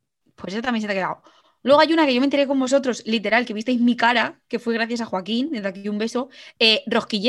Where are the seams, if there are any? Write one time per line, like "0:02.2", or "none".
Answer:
none

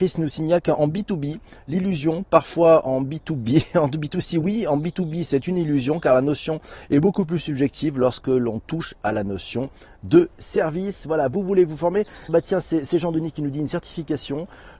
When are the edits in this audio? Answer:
0:12.3

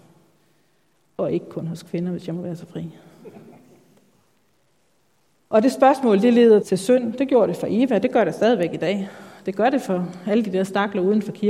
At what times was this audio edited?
0:06.6

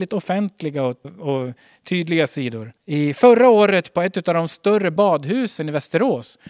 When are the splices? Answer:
0:01.0
0:02.8

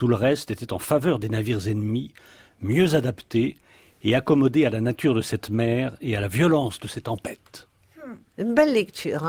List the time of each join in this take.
none

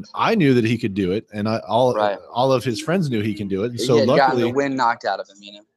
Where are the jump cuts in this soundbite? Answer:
none

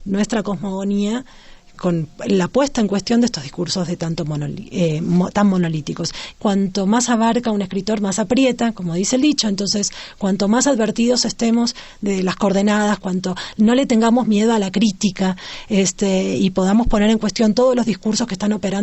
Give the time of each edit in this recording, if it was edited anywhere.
0:06.3
0:13.0

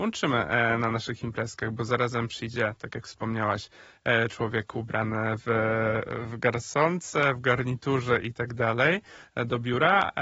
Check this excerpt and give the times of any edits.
none

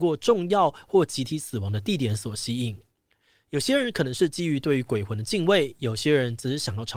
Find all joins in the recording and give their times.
none

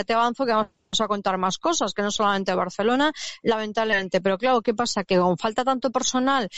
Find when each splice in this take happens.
0:05.0

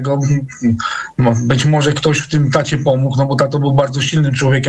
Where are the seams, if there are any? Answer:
none

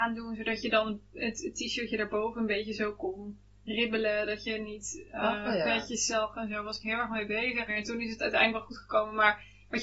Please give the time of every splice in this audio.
0:07.7

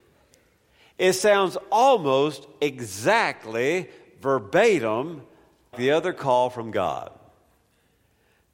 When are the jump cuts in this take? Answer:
0:05.7

